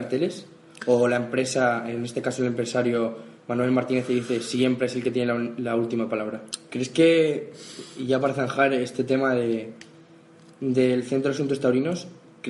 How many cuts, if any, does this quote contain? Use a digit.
1